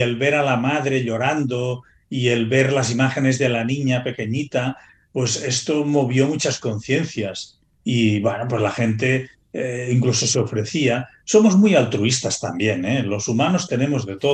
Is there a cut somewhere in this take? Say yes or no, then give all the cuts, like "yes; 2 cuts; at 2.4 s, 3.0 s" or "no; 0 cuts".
no; 0 cuts